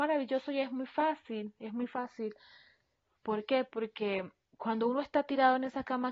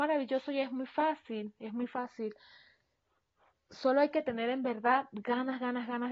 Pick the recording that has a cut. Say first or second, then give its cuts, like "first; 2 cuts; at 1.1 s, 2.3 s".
first; 1 cut; at 3.2 s